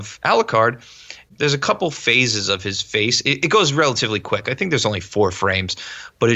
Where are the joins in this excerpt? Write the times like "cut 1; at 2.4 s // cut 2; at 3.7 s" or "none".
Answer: none